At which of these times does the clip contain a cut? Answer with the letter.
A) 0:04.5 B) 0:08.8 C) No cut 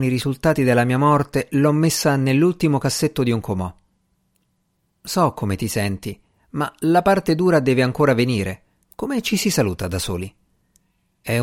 B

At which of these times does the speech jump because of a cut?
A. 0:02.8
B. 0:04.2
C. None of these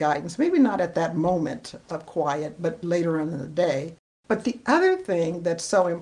A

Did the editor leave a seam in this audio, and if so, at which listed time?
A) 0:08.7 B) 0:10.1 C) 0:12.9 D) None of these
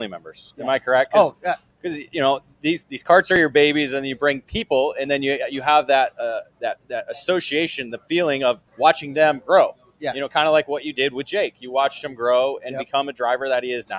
A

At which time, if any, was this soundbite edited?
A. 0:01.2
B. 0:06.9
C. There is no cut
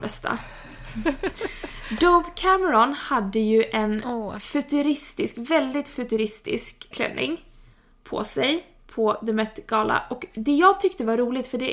B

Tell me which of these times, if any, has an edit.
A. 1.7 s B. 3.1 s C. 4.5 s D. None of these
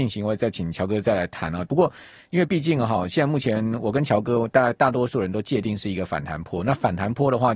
A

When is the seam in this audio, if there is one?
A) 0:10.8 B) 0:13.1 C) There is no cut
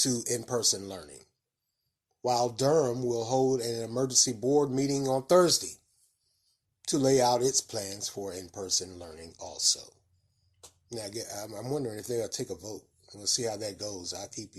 C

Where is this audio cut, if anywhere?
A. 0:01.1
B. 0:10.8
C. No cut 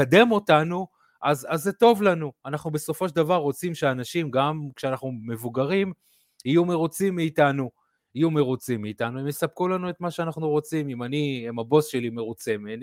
C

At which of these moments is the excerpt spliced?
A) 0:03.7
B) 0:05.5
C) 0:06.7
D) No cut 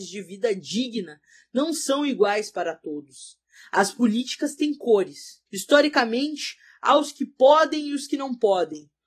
B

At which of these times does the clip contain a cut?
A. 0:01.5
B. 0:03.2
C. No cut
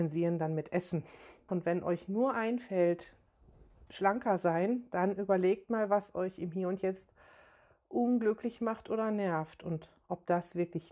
A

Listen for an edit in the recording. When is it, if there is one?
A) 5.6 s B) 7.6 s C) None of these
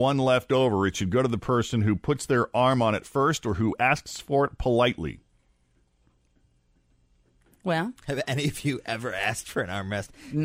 C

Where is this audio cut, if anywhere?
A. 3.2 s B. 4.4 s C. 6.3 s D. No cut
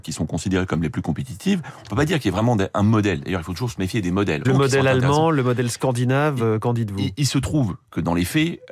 B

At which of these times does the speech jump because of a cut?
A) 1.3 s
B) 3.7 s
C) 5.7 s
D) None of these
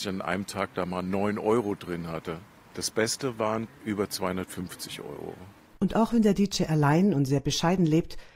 B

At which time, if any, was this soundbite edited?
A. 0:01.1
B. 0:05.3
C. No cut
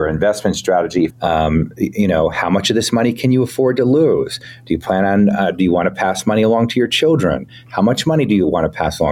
A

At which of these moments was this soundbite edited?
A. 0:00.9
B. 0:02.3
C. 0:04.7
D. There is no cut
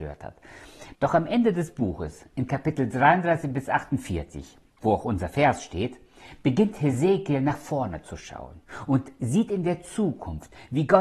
A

